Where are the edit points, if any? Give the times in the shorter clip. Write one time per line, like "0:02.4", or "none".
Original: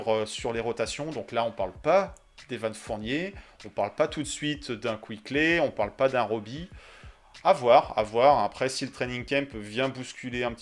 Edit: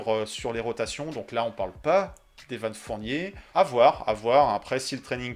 0:03.5